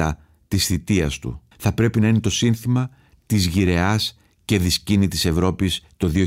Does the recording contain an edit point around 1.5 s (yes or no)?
yes